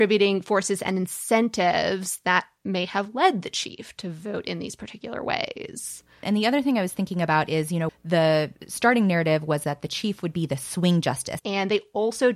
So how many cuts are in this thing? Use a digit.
3